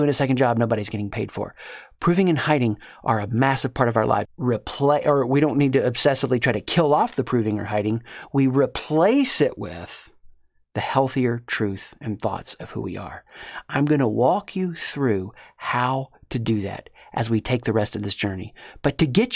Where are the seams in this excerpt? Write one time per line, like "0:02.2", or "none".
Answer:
0:04.2